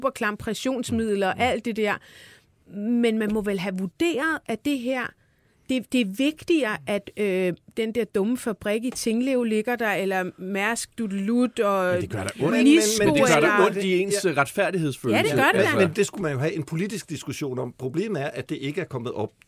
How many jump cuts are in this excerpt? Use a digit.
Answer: 1